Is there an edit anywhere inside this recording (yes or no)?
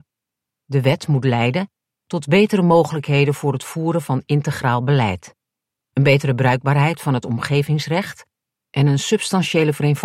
no